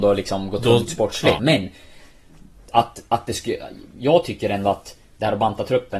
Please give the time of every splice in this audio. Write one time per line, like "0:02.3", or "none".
0:01.4